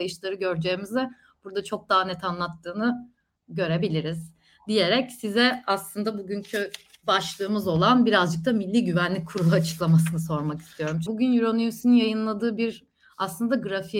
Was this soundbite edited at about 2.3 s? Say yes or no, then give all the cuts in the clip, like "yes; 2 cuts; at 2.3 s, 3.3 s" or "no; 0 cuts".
no; 1 cut; at 11.1 s